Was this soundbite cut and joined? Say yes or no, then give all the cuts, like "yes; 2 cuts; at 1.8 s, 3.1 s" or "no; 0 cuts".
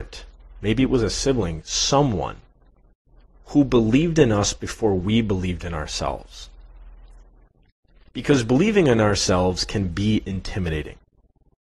no; 0 cuts